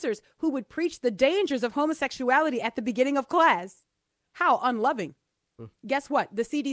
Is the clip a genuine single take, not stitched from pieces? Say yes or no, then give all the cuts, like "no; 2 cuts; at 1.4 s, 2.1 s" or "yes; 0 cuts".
no; 1 cut; at 5.8 s